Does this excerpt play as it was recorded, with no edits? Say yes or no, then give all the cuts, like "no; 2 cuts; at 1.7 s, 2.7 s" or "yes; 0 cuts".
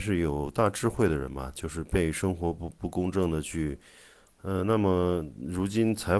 no; 1 cut; at 4.3 s